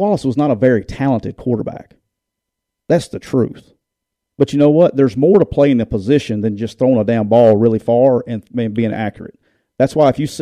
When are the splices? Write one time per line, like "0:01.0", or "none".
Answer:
0:04.3